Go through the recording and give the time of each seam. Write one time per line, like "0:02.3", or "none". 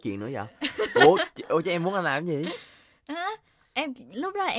none